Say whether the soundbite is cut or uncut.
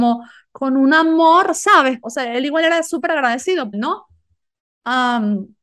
cut